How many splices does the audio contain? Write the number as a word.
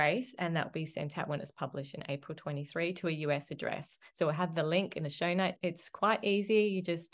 one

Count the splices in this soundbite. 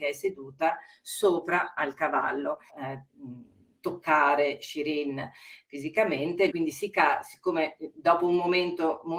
two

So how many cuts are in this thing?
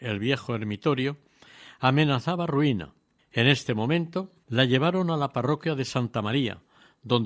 two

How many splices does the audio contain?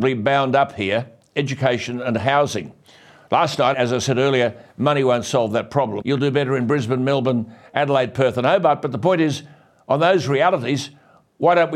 two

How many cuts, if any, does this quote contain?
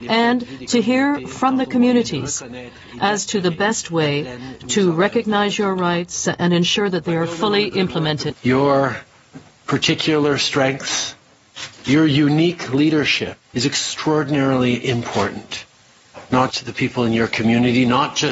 three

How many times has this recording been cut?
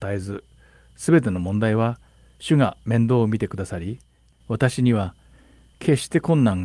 zero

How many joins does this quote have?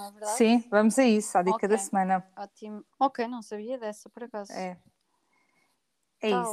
one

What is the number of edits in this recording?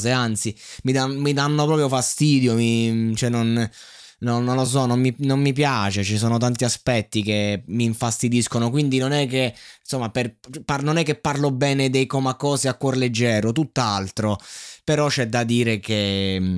zero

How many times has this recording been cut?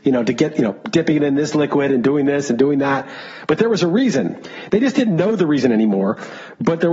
zero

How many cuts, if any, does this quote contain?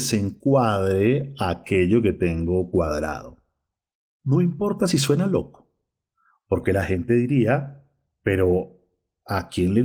zero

